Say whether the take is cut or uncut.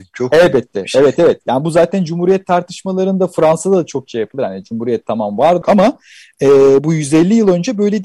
cut